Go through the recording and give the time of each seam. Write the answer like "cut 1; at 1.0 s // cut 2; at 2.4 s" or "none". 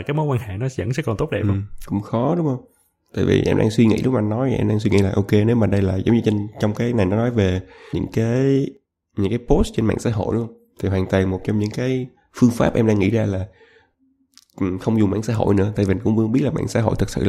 cut 1; at 7.9 s